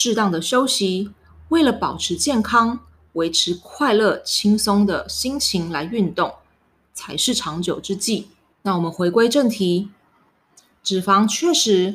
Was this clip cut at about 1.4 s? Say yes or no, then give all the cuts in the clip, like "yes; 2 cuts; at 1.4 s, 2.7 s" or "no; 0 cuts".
no; 1 cut; at 8.5 s